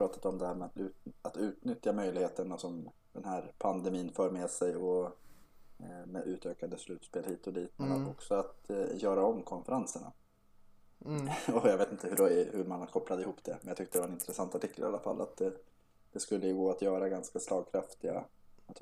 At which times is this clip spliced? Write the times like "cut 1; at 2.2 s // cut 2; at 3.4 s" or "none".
none